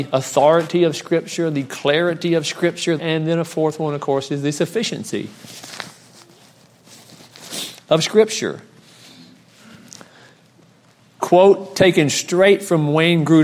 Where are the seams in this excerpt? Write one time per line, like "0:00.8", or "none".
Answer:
0:03.0